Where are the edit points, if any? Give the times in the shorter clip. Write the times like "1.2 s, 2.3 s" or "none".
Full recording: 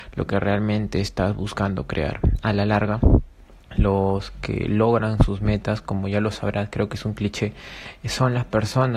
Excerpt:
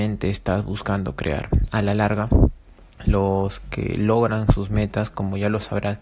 none